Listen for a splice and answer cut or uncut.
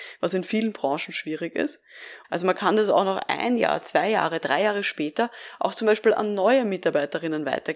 cut